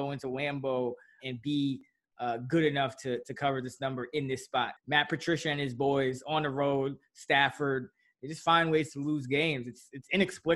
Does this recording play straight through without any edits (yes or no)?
no